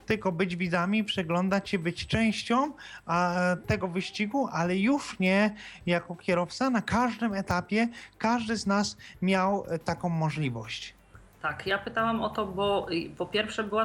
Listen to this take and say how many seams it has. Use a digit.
0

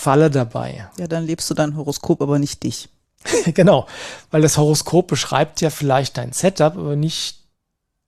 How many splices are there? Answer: 0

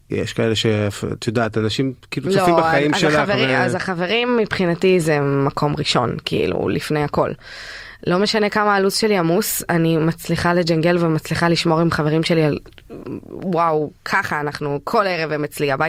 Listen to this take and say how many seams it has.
0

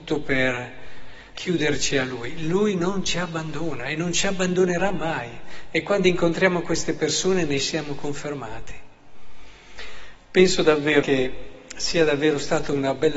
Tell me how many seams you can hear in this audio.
2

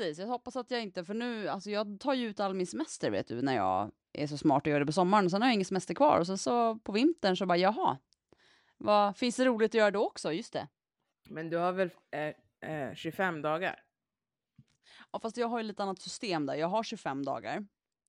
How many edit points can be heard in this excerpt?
0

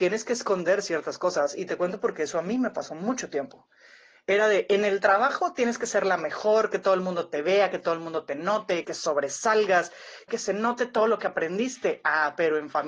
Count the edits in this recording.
2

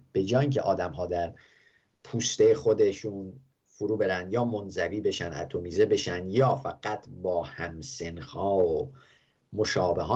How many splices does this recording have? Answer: 0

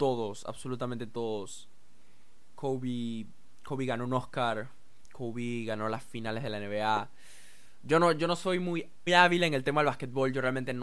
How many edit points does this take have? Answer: 1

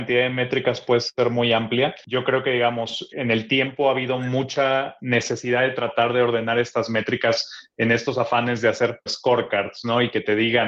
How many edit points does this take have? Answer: 2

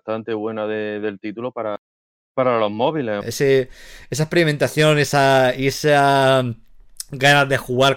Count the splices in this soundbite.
1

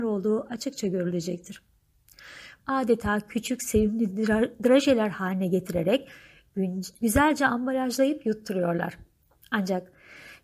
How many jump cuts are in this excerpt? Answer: 1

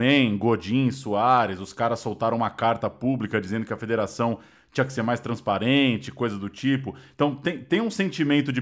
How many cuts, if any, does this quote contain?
0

